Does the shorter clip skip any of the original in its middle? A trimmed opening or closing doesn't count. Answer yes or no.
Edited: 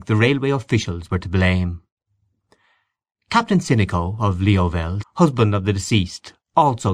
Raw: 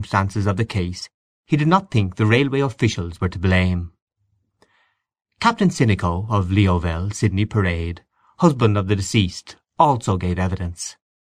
yes